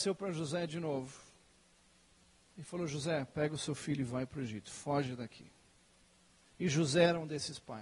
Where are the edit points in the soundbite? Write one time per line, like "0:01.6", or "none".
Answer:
0:06.5